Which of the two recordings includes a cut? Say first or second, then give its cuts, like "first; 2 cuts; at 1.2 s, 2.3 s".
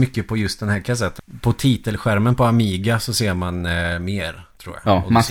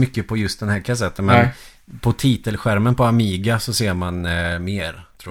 first; 1 cut; at 1.2 s